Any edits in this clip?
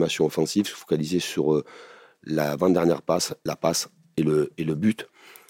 no; 0 cuts

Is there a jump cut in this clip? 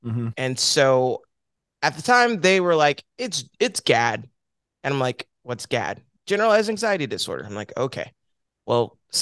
no; 0 cuts

